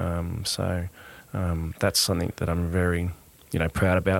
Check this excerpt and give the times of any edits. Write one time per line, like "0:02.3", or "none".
none